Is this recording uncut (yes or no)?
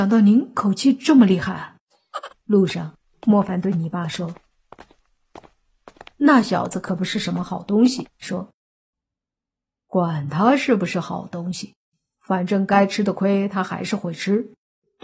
no